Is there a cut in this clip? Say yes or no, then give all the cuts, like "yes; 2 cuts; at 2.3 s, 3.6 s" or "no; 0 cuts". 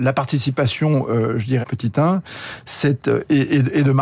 yes; 1 cut; at 1.6 s